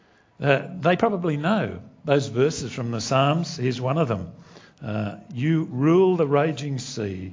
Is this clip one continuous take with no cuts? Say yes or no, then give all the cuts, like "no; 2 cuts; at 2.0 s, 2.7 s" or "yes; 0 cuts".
yes; 0 cuts